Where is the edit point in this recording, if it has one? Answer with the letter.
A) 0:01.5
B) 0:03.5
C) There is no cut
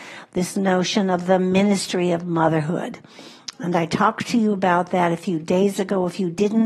C